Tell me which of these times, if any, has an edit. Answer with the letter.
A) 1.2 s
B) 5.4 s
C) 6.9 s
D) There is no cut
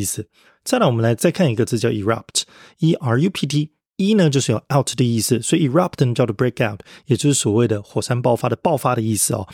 A